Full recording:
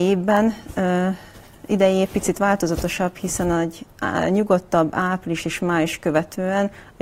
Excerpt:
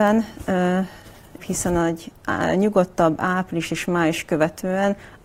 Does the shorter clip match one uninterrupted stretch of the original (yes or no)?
no